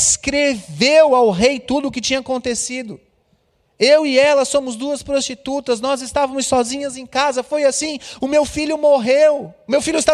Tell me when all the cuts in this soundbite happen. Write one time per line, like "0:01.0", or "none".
none